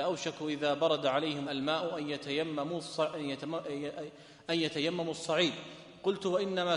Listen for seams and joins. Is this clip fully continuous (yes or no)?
no